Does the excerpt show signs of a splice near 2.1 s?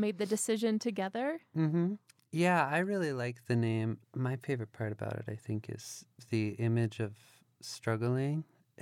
no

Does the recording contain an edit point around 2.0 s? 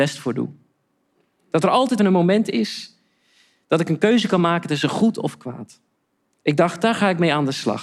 yes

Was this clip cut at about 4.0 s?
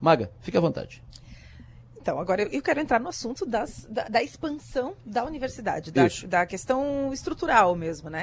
yes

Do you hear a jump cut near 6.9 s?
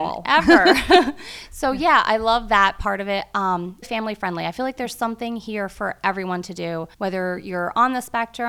yes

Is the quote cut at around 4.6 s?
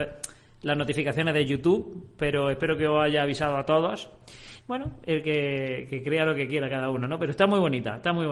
yes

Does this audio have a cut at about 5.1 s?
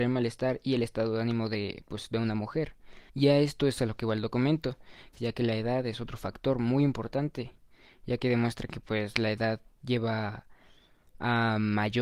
yes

